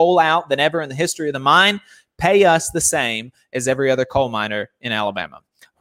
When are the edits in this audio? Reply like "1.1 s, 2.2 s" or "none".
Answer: none